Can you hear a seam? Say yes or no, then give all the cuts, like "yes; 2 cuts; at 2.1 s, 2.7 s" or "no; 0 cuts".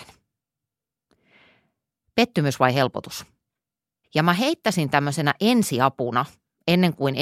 yes; 2 cuts; at 2.0 s, 4.0 s